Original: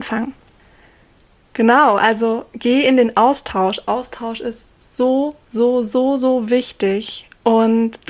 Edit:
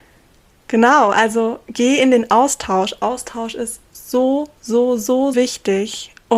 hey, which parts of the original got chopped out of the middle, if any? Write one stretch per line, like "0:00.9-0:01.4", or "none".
0:06.2-0:06.5